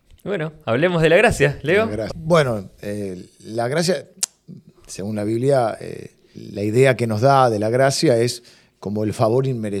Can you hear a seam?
yes; 2 cuts; at 2.1 s, 6.3 s

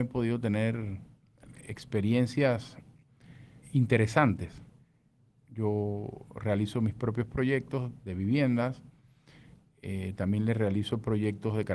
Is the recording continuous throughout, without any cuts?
no; 2 cuts; at 3.6 s, 5.4 s

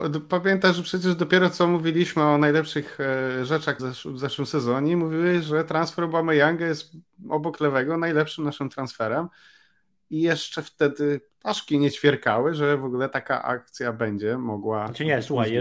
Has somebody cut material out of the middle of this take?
yes; 1 cut; at 3.8 s

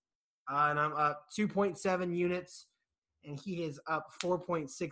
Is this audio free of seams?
no; 1 cut; at 3.0 s

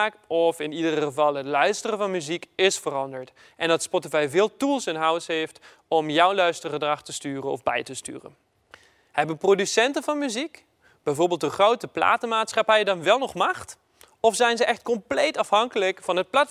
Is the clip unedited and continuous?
yes; 0 cuts

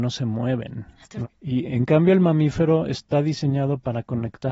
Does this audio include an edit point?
yes; 1 cut; at 1.2 s

